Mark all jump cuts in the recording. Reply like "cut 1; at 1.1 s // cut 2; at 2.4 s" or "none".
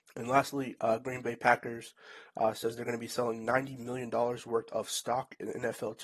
none